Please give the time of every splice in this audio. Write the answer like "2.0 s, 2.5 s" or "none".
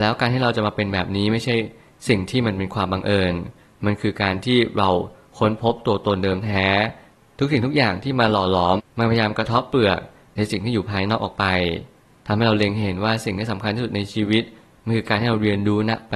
8.8 s